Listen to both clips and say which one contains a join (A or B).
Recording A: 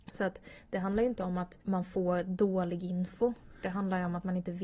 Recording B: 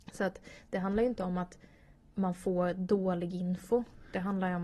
A